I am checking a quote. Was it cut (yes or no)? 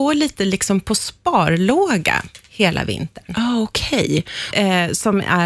yes